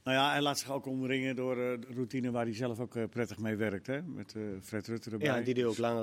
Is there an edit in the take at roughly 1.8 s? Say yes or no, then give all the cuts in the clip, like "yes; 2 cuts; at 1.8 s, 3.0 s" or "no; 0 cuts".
yes; 1 cut; at 1.8 s